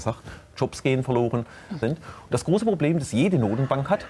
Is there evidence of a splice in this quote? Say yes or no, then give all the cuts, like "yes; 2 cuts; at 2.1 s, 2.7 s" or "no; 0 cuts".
yes; 1 cut; at 1.8 s